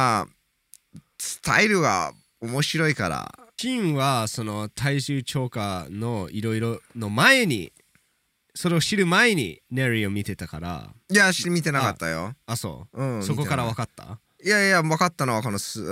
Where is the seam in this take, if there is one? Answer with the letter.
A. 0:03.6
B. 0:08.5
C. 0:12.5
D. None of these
A